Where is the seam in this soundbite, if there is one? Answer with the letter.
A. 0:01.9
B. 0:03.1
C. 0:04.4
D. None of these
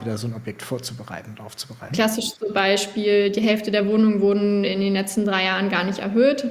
A